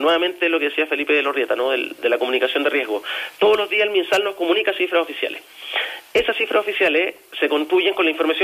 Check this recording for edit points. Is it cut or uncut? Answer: uncut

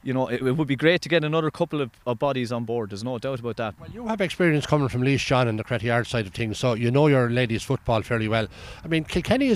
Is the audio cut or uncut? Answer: cut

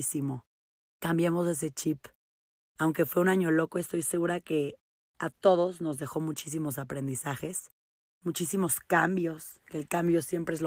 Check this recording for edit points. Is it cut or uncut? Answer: cut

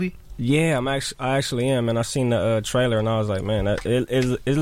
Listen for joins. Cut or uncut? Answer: uncut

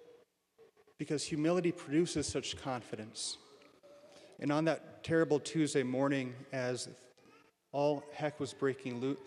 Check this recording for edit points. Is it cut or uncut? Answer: cut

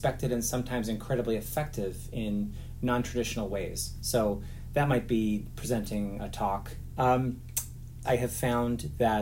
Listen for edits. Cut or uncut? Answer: cut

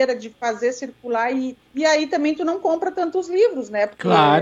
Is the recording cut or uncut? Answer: cut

